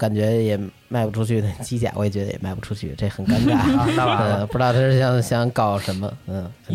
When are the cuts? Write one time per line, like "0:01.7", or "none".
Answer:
none

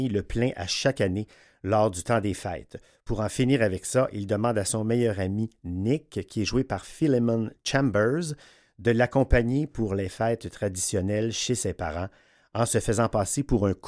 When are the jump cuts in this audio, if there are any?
none

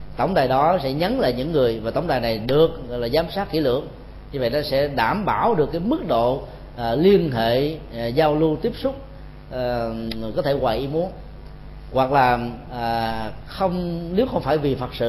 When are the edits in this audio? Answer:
none

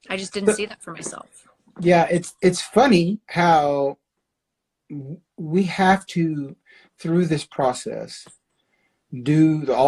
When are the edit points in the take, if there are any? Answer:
none

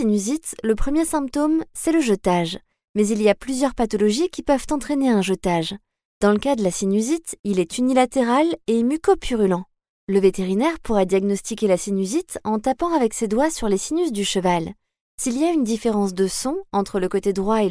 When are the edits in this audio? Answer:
none

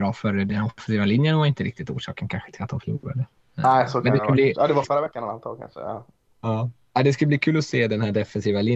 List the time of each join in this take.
0:04.8

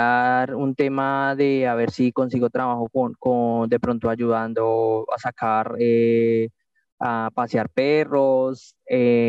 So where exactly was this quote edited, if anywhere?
0:02.9

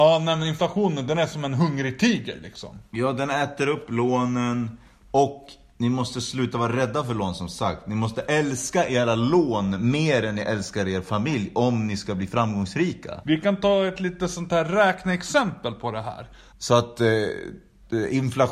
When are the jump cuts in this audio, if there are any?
0:13.2
0:16.5

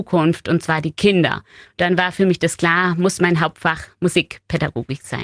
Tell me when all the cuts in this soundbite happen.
none

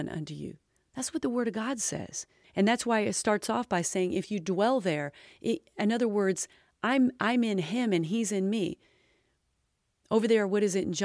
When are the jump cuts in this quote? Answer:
0:02.4

